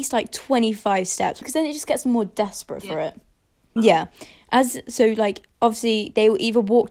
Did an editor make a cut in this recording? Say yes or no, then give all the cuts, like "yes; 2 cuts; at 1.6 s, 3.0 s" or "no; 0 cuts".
yes; 3 cuts; at 1.4 s, 3.8 s, 5.5 s